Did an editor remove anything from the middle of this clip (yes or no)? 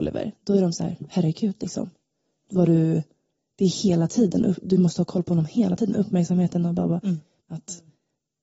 yes